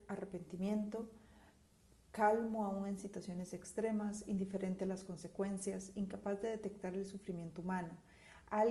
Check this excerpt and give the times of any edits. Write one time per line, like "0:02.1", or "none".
none